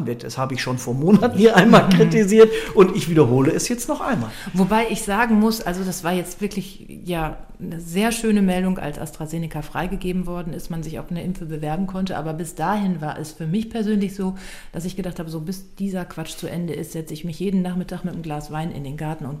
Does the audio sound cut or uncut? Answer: uncut